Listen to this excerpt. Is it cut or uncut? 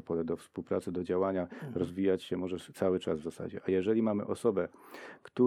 uncut